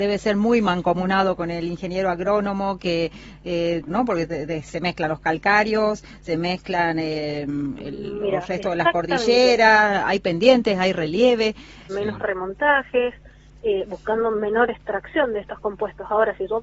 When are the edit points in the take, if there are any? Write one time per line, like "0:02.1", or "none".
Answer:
0:03.9
0:11.9